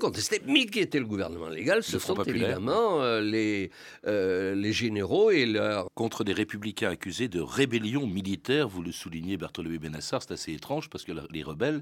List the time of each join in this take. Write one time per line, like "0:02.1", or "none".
0:05.9